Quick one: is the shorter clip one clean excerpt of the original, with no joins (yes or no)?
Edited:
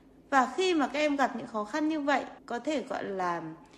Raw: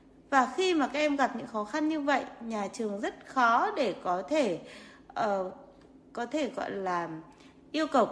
no